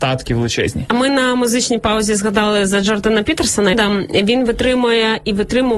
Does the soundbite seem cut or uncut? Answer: cut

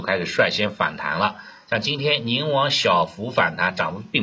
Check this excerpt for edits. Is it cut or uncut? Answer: uncut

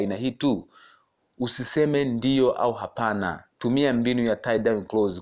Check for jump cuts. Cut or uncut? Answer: cut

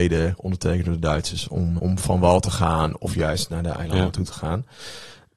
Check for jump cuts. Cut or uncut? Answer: cut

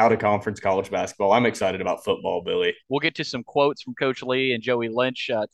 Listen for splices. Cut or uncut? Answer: cut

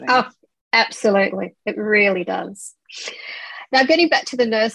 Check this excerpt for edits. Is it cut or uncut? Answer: uncut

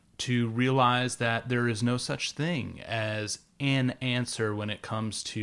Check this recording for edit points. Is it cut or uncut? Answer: uncut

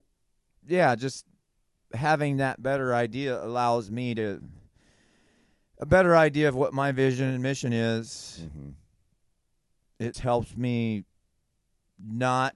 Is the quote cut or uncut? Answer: cut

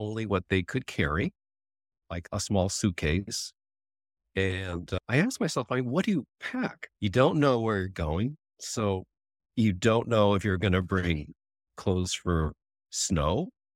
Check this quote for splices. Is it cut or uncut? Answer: uncut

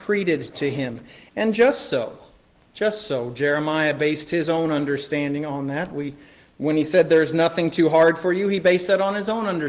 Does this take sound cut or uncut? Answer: uncut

